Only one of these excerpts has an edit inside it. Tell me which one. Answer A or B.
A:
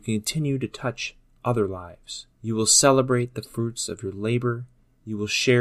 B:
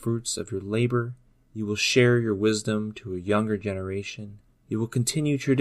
A